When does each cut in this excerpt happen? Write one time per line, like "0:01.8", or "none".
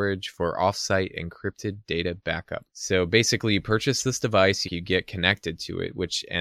0:02.7
0:04.7